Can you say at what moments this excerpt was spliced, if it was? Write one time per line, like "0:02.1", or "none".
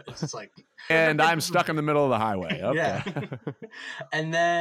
0:00.9